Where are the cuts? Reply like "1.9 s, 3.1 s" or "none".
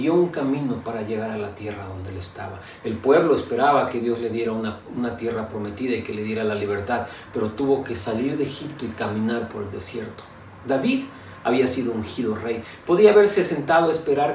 none